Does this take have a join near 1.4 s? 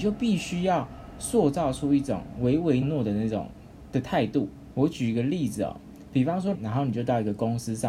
no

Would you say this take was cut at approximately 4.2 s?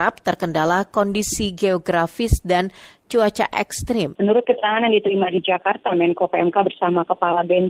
yes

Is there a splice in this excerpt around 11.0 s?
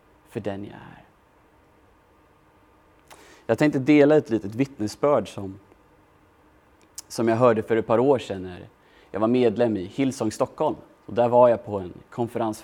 yes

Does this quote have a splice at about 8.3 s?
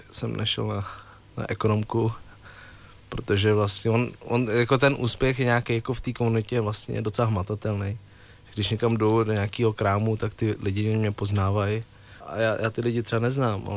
no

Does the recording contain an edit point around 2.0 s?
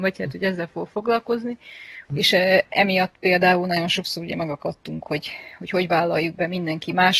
yes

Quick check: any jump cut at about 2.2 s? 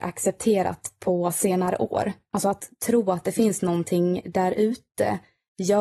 no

